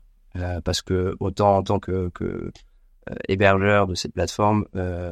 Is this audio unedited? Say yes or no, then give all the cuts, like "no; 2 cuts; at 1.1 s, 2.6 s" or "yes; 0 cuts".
yes; 0 cuts